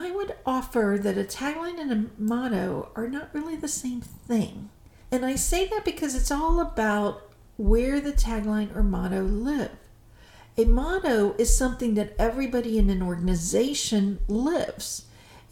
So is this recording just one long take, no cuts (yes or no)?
yes